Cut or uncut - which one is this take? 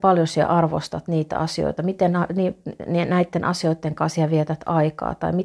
uncut